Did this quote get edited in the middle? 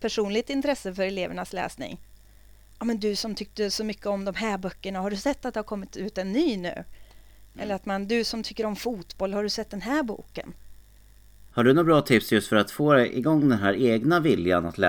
yes; 1 cut; at 11.5 s

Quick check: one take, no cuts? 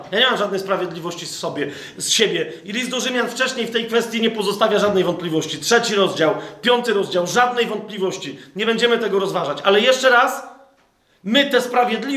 yes; 0 cuts

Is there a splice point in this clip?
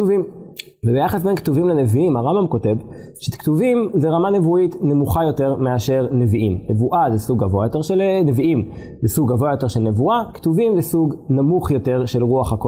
no; 0 cuts

